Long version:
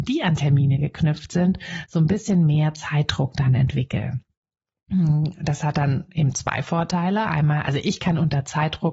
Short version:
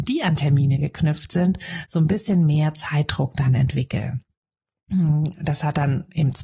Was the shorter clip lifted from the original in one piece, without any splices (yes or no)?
yes